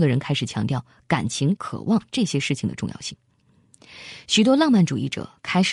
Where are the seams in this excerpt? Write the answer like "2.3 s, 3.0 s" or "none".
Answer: 1.6 s